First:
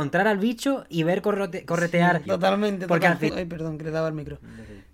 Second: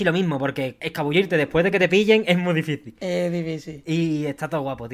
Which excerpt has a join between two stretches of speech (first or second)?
first